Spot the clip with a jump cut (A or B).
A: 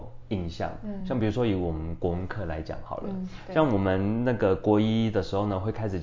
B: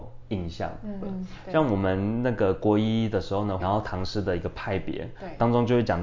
B